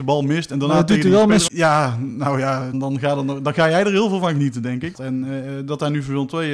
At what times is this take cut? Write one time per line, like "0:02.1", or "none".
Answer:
0:01.5
0:02.7
0:04.9